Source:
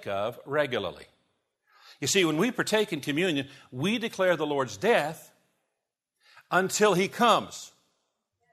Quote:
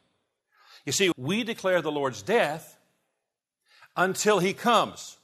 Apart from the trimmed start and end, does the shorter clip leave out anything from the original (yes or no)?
yes